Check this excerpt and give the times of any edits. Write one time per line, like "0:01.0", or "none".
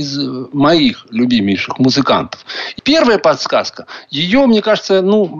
0:02.8